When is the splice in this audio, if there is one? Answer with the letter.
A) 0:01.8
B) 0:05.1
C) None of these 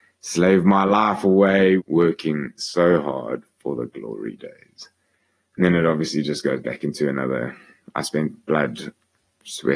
A